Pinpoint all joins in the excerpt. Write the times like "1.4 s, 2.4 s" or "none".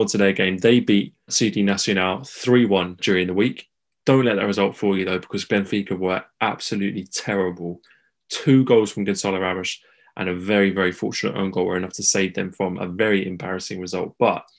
none